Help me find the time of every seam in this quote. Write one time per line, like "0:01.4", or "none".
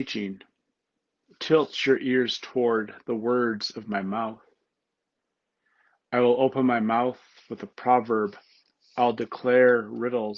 none